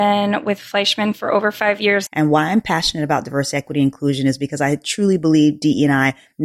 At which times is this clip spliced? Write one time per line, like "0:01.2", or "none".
0:02.1